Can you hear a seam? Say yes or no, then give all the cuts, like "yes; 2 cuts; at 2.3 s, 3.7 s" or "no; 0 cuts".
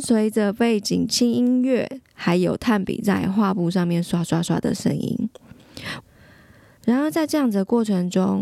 yes; 1 cut; at 6.0 s